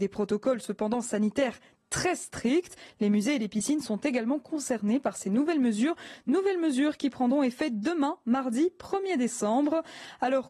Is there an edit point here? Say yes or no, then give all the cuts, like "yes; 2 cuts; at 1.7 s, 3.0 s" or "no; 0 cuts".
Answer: no; 0 cuts